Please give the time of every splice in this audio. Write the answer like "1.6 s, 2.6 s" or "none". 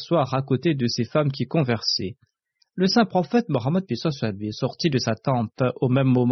none